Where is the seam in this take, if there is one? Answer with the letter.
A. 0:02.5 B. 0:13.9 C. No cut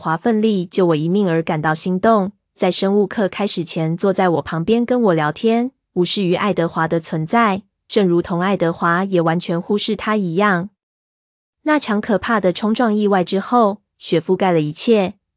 A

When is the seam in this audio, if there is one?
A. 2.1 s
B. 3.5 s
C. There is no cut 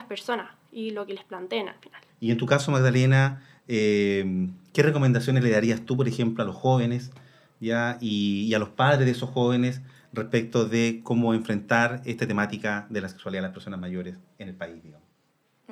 A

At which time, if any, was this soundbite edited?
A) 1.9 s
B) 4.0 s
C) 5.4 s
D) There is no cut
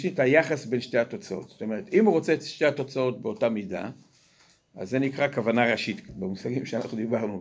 D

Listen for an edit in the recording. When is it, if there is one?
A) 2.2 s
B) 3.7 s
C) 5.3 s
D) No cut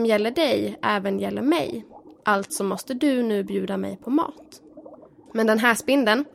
C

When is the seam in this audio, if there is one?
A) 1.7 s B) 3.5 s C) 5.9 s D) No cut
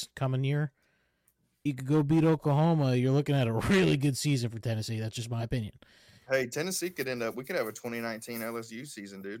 A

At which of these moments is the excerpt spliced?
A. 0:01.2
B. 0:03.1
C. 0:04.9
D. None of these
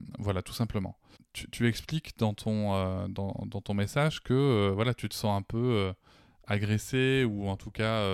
A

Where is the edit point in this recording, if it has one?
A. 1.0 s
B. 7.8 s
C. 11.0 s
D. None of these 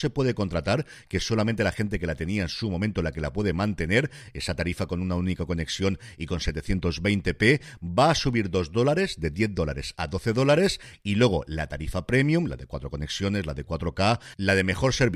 D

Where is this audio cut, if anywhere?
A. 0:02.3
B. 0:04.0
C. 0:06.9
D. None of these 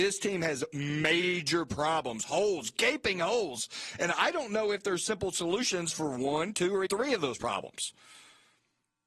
C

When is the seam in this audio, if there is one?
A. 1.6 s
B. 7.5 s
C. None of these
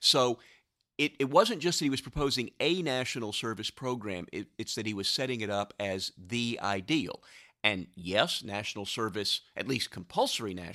C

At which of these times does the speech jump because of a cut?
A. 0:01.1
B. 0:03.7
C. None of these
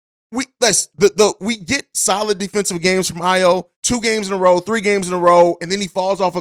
B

